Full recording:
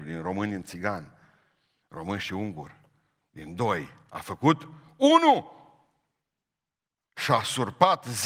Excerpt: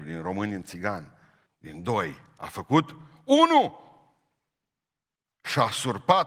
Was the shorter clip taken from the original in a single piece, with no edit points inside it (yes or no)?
no